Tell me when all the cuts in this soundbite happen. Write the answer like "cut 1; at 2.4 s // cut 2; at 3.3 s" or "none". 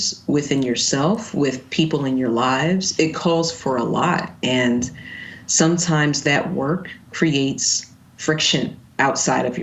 none

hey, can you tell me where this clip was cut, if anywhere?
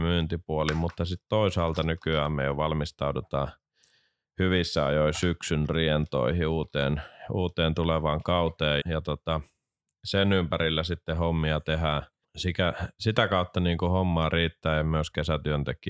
cut 1; at 8.8 s // cut 2; at 12.2 s

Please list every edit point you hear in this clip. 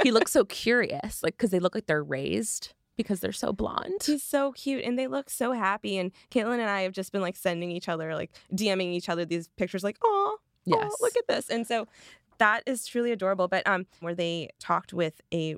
cut 1; at 14.0 s

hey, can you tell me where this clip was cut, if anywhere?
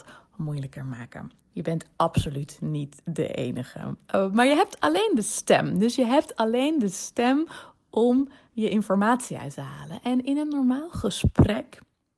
cut 1; at 1.4 s // cut 2; at 4.1 s

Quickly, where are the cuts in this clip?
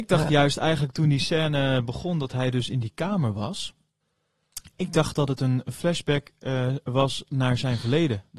none

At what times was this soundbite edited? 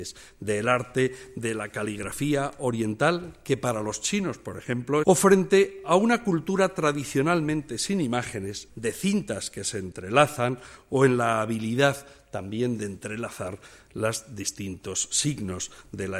cut 1; at 5.0 s // cut 2; at 8.7 s

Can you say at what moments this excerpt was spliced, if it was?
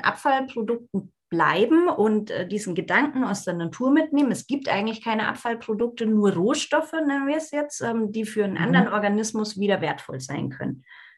none

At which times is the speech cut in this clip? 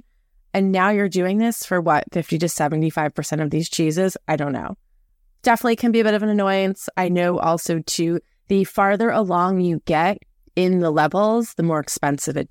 none

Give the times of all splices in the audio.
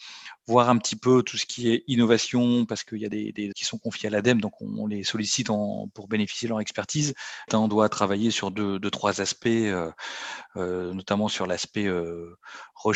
cut 1; at 3.5 s // cut 2; at 7.5 s

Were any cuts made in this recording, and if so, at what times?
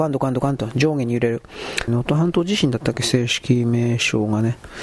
cut 1; at 1.9 s

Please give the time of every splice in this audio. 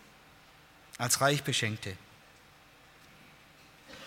none

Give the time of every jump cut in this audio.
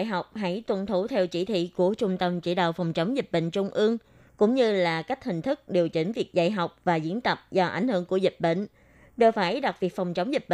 cut 1; at 4.3 s

